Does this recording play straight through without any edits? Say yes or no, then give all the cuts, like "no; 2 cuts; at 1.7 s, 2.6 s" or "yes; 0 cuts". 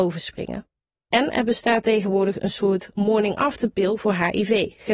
yes; 0 cuts